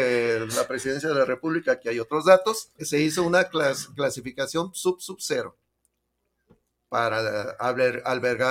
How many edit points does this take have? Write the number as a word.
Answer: one